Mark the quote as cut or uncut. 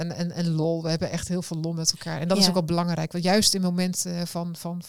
uncut